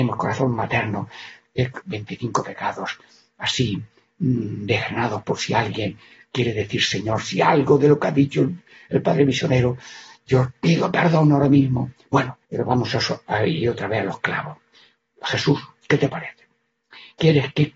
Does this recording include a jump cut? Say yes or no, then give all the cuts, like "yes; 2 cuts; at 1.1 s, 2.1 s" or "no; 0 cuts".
yes; 2 cuts; at 1.8 s, 12.5 s